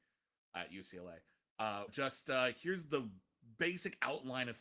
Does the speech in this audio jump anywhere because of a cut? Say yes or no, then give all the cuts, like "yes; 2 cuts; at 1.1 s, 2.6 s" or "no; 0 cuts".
yes; 1 cut; at 1.9 s